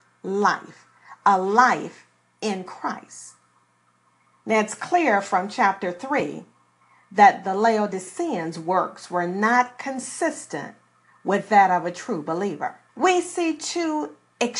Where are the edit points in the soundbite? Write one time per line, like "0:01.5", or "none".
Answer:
0:12.9